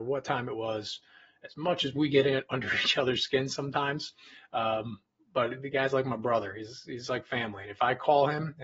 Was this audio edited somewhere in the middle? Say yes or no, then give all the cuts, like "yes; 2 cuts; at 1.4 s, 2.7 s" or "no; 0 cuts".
no; 0 cuts